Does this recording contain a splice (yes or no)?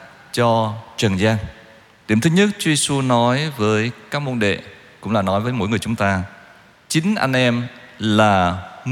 yes